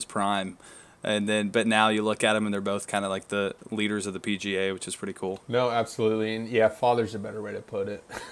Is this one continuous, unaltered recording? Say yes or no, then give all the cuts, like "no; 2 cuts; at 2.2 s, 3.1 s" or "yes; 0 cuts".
yes; 0 cuts